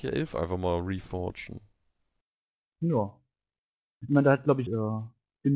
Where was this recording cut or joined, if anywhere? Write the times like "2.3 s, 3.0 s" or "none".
4.7 s